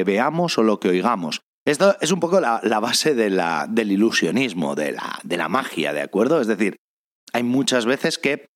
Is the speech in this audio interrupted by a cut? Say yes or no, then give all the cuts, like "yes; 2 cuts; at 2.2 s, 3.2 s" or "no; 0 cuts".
no; 0 cuts